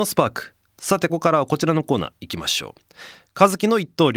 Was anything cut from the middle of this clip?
yes; 1 cut; at 1.1 s

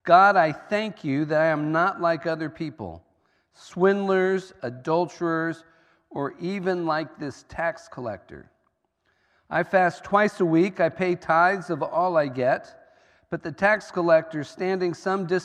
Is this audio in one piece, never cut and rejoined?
no; 1 cut; at 4.6 s

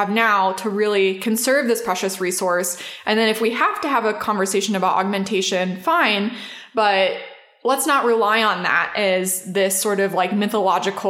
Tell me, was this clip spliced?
no; 0 cuts

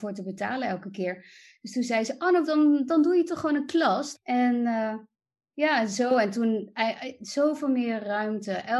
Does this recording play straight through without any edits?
no; 2 cuts; at 2.5 s, 4.1 s

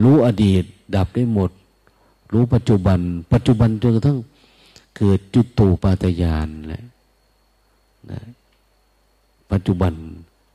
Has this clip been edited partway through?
yes; 1 cut; at 5.8 s

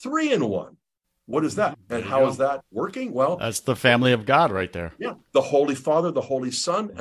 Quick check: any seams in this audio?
yes; 1 cut; at 1.7 s

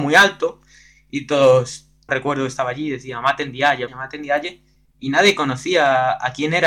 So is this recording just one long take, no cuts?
no; 2 cuts; at 2.1 s, 3.9 s

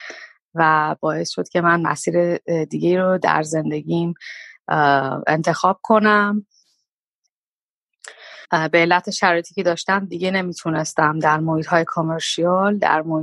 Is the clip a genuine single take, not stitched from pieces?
no; 1 cut; at 8.4 s

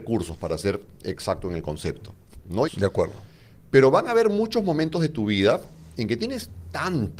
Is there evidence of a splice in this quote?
yes; 1 cut; at 2.7 s

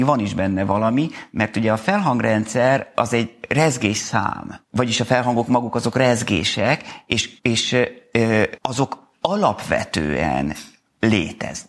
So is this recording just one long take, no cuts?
no; 3 cuts; at 4.6 s, 7.4 s, 8.6 s

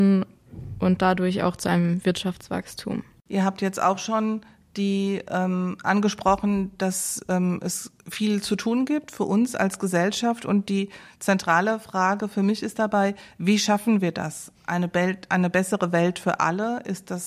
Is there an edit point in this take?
no; 0 cuts

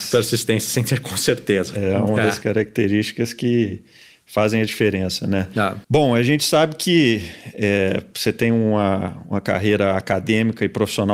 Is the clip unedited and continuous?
no; 1 cut; at 5.8 s

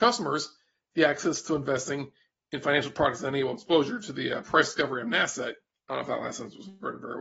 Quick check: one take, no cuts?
no; 1 cut; at 5.8 s

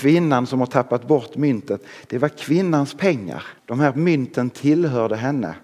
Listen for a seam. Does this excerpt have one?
yes; 1 cut; at 3.6 s

